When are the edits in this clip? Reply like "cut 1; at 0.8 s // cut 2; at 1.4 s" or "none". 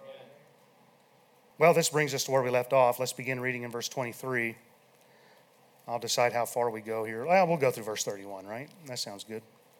none